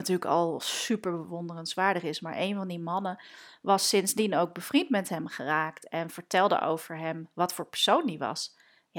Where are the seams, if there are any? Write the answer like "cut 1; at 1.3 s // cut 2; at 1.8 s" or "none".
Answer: none